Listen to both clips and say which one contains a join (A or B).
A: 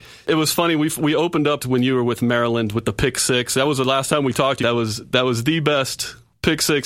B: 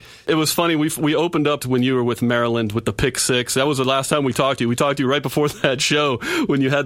A